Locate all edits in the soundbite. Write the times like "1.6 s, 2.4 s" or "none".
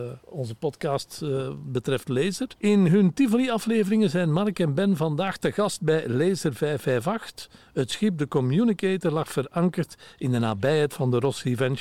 none

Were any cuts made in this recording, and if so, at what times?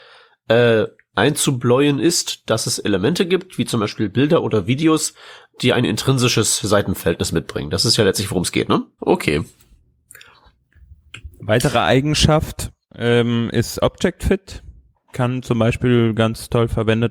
9.0 s

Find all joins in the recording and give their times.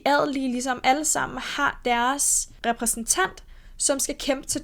none

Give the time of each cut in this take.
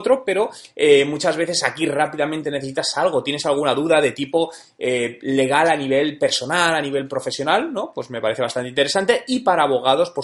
none

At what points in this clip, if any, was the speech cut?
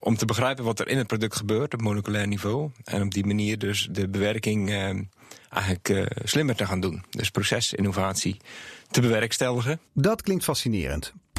9.9 s

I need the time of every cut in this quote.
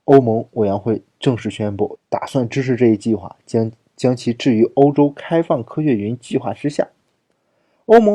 2.0 s

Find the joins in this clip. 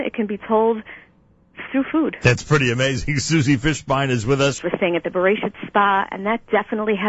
1.7 s, 4.6 s

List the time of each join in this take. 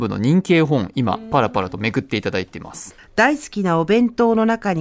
3.0 s

